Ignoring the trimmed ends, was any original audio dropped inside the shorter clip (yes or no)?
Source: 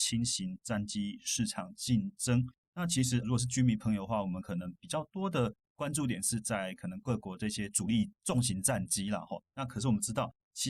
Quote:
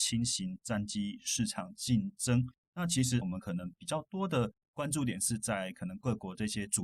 yes